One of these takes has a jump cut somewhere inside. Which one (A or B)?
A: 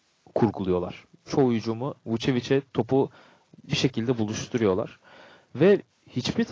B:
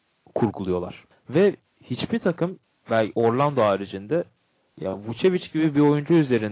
B